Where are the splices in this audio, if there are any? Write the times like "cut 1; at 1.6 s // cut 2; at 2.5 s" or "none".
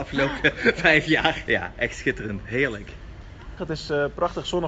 cut 1; at 1.5 s // cut 2; at 3.6 s